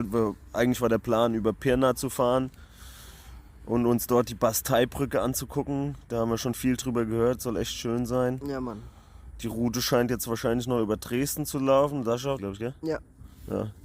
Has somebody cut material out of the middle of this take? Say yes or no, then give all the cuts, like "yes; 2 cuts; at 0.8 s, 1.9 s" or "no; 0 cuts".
yes; 1 cut; at 12.4 s